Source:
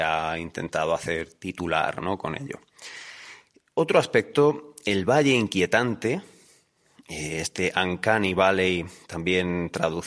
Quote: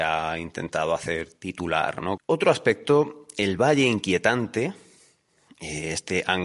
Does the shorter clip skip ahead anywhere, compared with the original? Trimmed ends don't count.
yes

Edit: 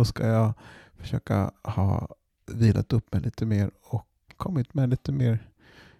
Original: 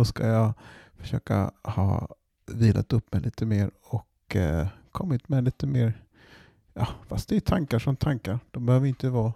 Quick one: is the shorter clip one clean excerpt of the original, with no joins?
no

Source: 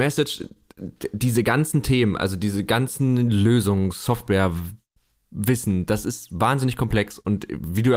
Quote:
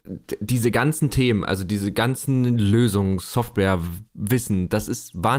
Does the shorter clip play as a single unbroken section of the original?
no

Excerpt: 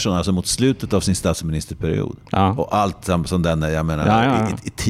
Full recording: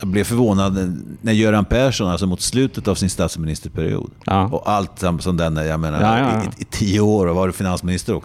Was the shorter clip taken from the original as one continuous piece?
yes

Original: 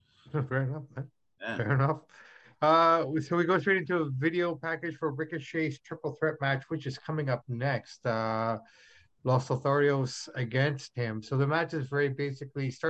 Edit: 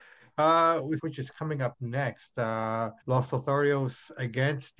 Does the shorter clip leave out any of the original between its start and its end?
yes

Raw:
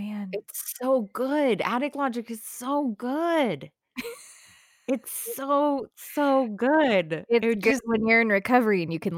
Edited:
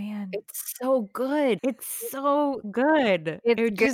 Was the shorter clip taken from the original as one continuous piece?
no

